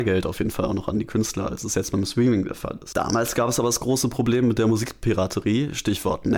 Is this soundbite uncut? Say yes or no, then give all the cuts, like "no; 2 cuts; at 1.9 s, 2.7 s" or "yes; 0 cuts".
yes; 0 cuts